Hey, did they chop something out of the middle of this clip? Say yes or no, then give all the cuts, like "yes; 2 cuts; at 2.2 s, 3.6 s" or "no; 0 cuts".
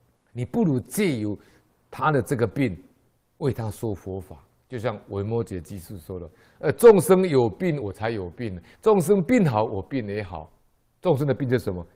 no; 0 cuts